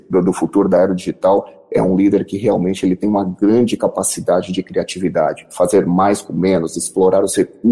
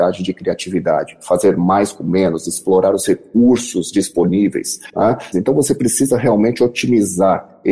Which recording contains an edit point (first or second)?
second